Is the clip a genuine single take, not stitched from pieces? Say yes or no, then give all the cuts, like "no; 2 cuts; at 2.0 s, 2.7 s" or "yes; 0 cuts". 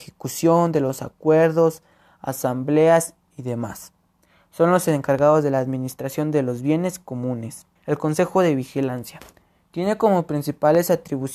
no; 1 cut; at 7.8 s